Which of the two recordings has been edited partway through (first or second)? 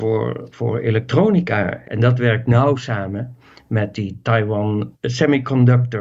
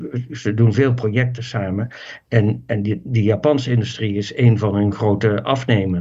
first